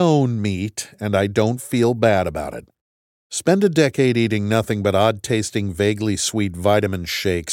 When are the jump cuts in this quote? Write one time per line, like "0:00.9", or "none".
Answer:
none